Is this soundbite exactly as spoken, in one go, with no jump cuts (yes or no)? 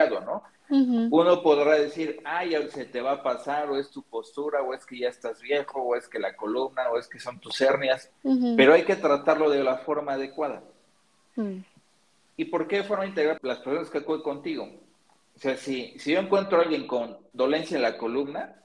no